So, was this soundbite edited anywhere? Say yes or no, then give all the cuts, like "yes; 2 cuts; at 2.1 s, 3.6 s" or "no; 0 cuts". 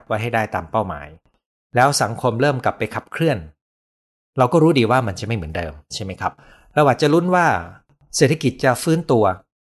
no; 0 cuts